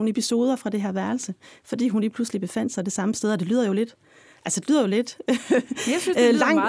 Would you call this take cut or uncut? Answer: uncut